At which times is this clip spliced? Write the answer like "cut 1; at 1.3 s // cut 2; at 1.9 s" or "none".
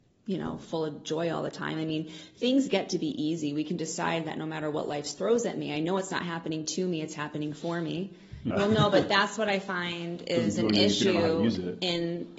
cut 1; at 8.5 s